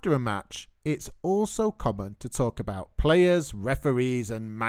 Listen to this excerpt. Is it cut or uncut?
uncut